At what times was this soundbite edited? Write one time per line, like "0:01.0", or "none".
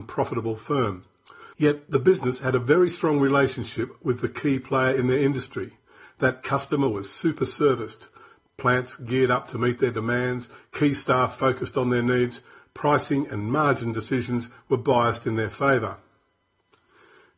0:01.5